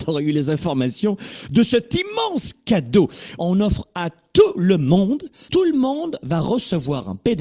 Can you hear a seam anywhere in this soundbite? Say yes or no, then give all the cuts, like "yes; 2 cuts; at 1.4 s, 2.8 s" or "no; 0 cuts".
yes; 2 cuts; at 3.4 s, 5.5 s